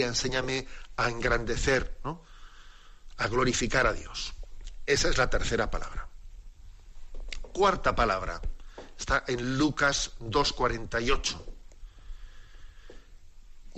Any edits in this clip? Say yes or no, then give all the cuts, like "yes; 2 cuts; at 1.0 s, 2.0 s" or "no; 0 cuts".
no; 0 cuts